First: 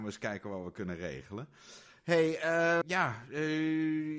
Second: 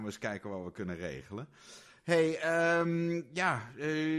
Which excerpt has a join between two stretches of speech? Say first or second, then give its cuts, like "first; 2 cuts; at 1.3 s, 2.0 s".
first; 1 cut; at 2.8 s